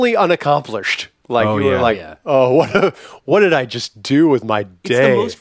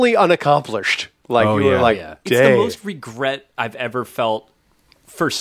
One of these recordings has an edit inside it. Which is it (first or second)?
second